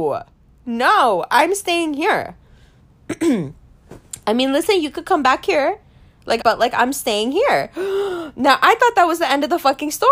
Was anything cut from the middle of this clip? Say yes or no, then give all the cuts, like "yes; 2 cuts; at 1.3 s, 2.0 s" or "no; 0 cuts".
yes; 1 cut; at 6.4 s